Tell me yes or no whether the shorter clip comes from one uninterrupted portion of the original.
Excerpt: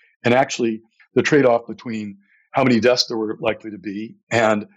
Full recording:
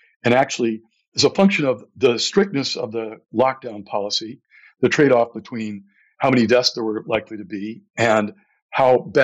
no